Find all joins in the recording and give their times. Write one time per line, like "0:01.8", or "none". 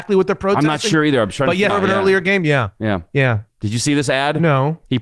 0:01.7
0:03.5